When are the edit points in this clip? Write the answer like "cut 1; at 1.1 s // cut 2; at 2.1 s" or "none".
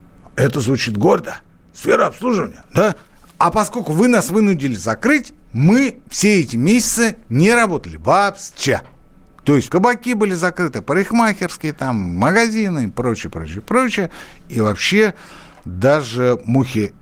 cut 1; at 9.7 s